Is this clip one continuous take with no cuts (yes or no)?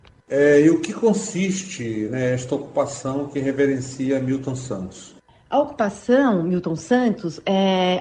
yes